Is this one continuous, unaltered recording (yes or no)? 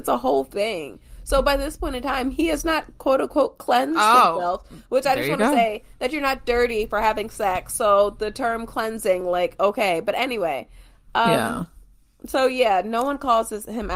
yes